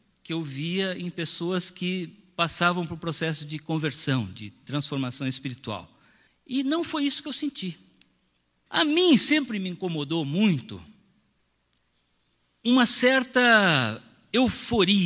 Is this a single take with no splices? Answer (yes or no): no